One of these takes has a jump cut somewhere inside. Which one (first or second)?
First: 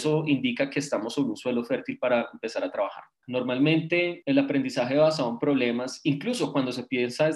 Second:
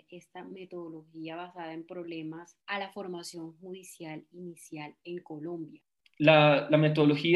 first